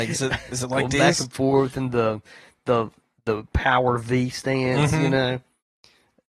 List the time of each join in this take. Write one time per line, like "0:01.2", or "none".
none